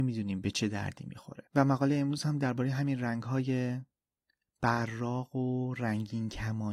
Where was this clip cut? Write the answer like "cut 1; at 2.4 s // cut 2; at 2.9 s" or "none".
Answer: cut 1; at 1.5 s